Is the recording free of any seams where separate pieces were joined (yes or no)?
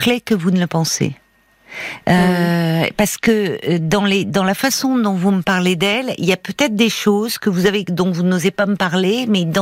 yes